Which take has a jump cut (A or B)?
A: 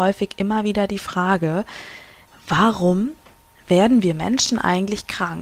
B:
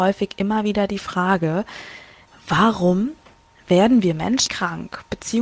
B